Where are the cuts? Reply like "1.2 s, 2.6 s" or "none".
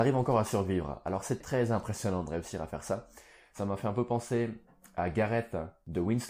1.4 s